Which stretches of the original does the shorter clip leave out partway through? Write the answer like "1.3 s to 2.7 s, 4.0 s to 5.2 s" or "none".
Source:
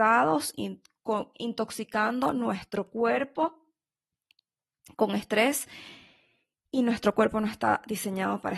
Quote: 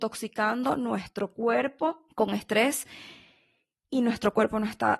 3.7 s to 4.9 s